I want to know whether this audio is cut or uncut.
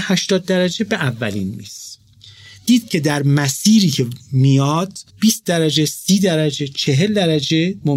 cut